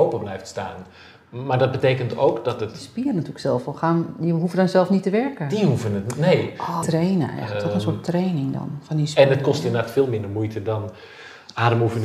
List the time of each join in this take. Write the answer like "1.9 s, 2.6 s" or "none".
6.8 s